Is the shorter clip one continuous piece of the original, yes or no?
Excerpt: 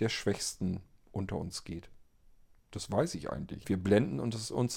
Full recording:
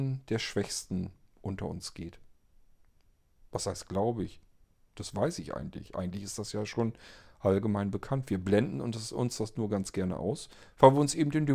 no